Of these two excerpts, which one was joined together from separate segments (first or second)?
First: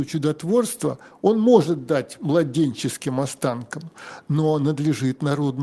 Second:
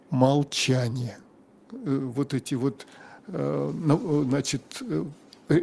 second